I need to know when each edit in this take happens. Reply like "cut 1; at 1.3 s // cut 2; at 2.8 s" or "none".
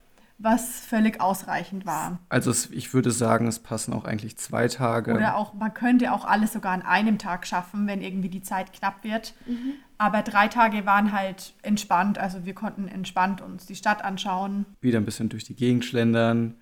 cut 1; at 14.7 s